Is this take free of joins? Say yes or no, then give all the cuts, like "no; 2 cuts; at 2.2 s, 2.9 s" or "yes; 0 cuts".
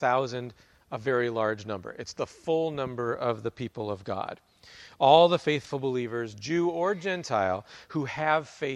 yes; 0 cuts